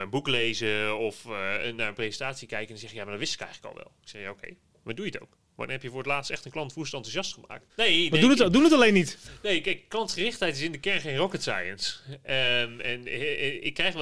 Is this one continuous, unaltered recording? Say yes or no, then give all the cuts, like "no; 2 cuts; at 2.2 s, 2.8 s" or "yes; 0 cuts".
no; 1 cut; at 7.7 s